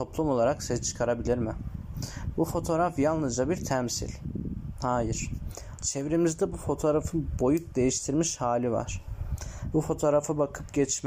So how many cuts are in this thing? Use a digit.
2